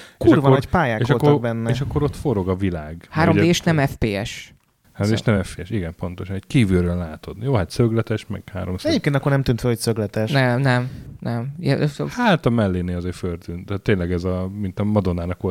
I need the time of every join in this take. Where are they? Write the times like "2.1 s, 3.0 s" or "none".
none